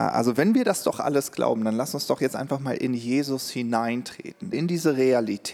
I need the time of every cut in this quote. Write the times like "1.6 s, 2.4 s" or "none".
4.5 s